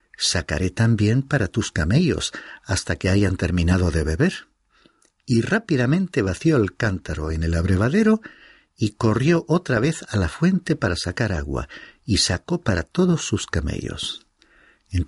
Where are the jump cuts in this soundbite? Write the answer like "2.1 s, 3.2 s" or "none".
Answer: none